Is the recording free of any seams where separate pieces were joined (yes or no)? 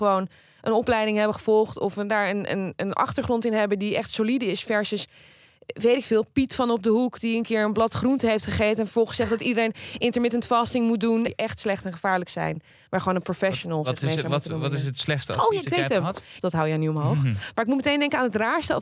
no